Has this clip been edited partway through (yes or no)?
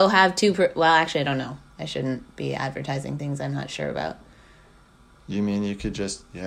no